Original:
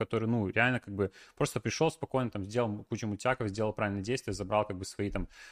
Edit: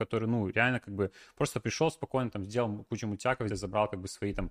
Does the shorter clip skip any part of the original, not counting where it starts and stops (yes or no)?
yes